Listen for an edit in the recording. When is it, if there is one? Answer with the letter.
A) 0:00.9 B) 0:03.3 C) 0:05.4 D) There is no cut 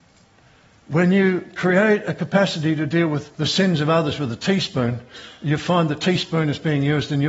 B